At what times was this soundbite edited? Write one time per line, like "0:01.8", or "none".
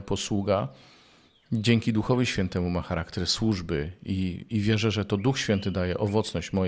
none